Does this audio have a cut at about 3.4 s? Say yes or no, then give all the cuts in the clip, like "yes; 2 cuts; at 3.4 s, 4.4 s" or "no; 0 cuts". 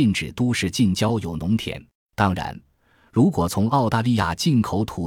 no; 1 cut; at 1.9 s